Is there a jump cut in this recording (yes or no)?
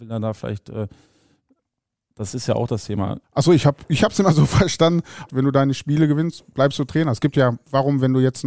yes